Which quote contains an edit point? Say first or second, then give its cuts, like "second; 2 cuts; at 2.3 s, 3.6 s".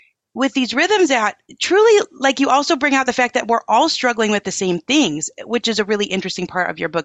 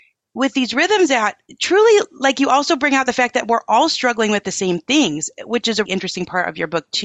second; 1 cut; at 5.9 s